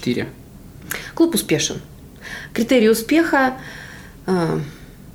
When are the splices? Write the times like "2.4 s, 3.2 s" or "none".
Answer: none